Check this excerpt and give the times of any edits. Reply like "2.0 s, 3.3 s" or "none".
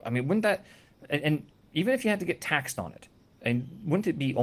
none